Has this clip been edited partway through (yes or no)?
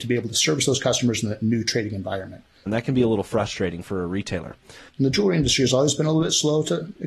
yes